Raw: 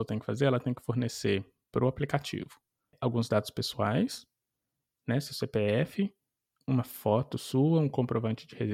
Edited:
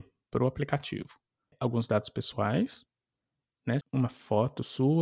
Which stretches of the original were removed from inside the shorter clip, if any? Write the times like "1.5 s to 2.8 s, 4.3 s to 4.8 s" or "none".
5.2 s to 6.6 s